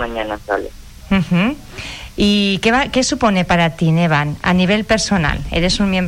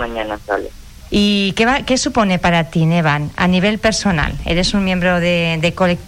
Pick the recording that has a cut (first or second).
second